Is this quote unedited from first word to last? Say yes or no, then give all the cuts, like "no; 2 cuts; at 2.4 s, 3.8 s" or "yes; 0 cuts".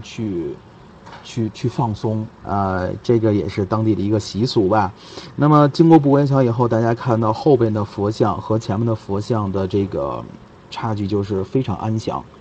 no; 1 cut; at 2.4 s